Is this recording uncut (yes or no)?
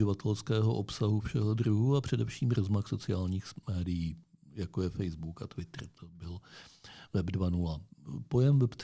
yes